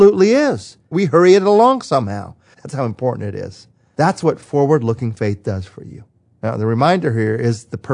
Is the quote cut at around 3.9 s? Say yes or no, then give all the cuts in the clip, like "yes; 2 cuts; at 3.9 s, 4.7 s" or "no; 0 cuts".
no; 2 cuts; at 0.9 s, 2.5 s